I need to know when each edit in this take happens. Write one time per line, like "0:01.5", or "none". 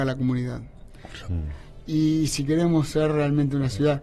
0:01.2